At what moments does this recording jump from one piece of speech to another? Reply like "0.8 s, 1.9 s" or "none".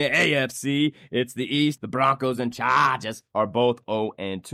1.8 s